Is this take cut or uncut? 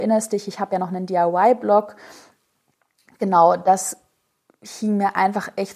uncut